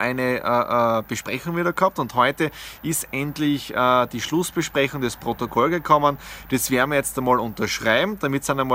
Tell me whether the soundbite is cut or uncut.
uncut